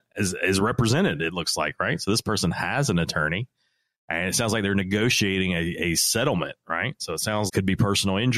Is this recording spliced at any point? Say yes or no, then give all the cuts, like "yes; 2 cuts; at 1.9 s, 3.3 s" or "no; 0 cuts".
yes; 1 cut; at 7.5 s